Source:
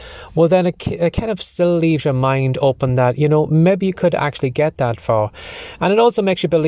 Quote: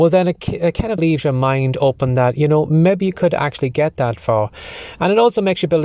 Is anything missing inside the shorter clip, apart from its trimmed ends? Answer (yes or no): yes